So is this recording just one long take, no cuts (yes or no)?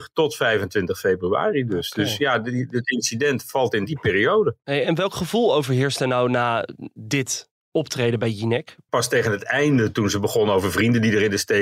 no